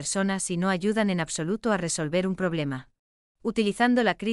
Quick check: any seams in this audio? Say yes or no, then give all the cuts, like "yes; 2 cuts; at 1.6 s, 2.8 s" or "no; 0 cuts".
yes; 1 cut; at 3.3 s